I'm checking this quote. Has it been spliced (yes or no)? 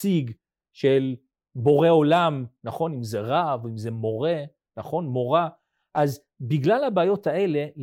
no